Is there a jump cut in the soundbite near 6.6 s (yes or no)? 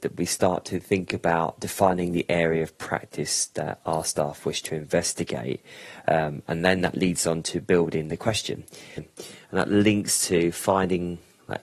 no